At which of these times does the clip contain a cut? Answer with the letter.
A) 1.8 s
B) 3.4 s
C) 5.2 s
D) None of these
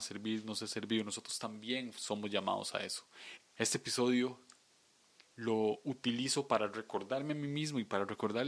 B